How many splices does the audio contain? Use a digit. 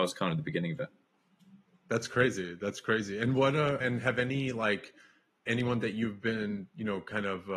1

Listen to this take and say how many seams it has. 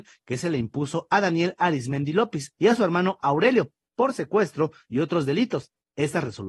1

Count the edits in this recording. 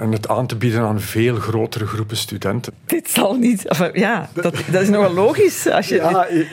1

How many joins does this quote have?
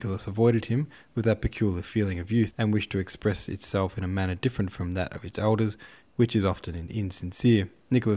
1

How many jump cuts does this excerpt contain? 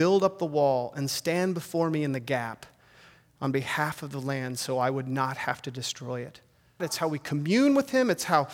1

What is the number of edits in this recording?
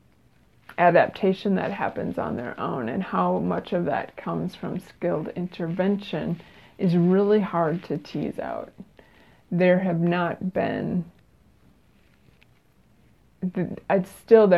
0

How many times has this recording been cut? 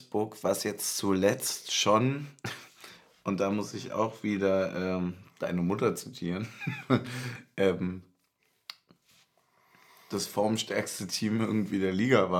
0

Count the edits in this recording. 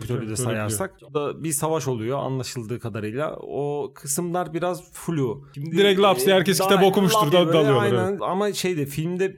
1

